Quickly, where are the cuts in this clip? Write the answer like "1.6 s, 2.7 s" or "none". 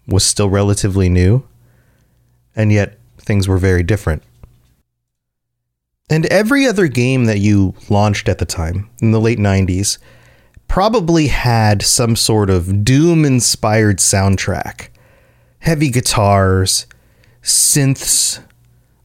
3.1 s